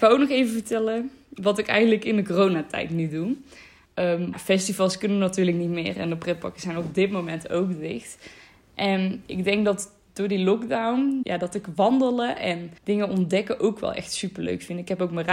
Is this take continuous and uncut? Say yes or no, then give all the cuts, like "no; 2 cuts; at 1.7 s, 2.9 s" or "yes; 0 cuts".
no; 3 cuts; at 4.3 s, 11.2 s, 12.8 s